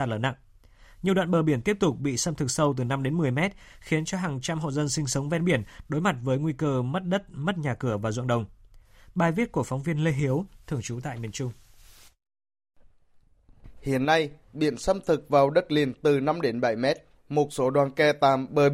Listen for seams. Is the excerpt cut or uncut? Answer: cut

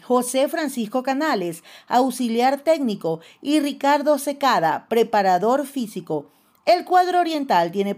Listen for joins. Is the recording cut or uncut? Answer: uncut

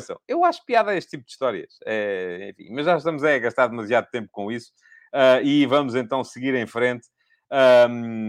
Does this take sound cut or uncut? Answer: uncut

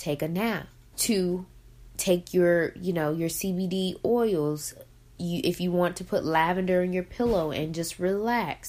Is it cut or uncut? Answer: cut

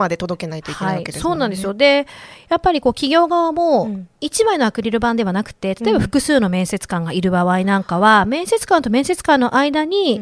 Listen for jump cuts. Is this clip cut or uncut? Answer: uncut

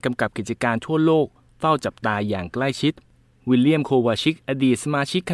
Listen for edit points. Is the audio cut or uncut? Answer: uncut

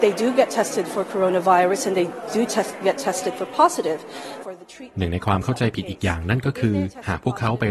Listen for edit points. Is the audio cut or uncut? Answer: cut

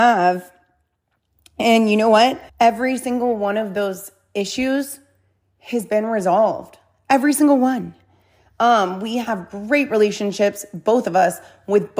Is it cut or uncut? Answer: cut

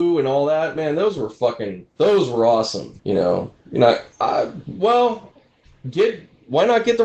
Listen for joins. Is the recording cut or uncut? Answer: cut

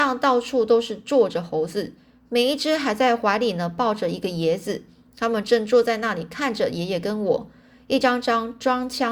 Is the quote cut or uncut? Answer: uncut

